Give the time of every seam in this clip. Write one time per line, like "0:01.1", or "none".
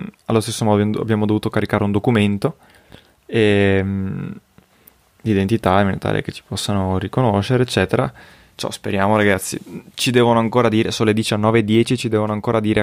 none